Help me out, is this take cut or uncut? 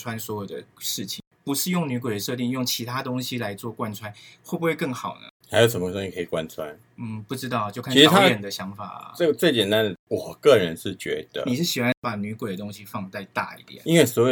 uncut